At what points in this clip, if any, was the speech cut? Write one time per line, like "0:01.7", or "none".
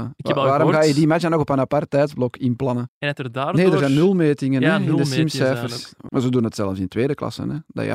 0:02.9
0:06.1